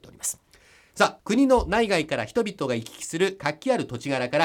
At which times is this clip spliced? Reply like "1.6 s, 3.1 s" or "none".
1.2 s